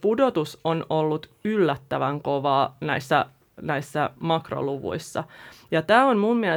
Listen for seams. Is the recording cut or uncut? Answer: uncut